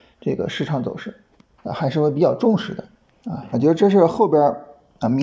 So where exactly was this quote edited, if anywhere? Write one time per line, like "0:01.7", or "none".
0:01.6
0:03.5